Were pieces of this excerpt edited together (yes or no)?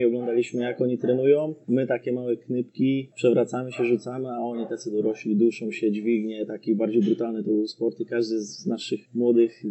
no